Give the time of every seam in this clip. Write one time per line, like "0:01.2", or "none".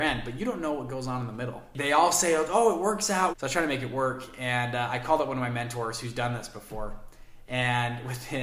0:03.3